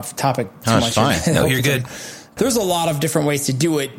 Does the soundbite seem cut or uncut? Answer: cut